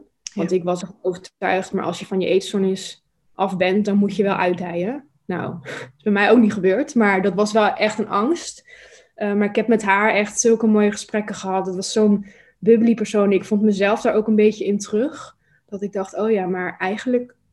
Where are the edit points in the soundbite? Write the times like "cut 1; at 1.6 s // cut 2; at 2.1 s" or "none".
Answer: none